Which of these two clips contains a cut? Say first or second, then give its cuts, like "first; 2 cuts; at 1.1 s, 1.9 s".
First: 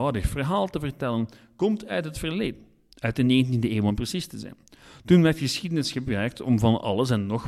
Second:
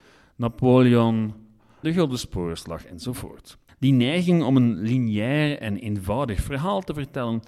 second; 2 cuts; at 1.8 s, 3.7 s